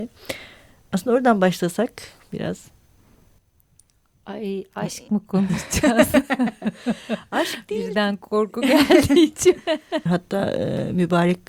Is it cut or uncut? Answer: cut